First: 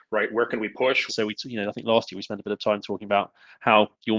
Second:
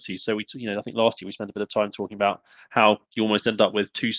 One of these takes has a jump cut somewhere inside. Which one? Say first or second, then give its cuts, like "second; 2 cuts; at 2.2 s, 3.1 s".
first; 1 cut; at 1.1 s